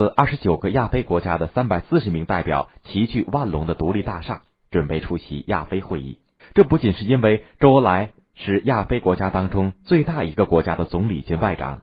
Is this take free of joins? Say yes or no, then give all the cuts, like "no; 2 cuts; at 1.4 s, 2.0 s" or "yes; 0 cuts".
no; 1 cut; at 6.4 s